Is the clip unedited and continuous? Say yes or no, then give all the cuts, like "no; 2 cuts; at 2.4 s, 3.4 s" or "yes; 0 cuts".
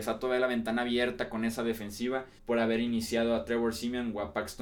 no; 1 cut; at 2.4 s